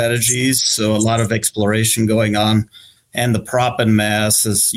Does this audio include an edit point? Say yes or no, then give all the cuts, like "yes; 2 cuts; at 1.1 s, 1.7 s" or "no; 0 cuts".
yes; 1 cut; at 3.0 s